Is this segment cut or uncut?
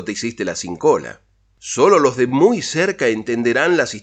uncut